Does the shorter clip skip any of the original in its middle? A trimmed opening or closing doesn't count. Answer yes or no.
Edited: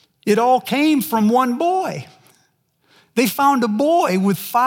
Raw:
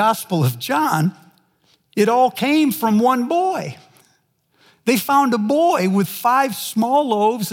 no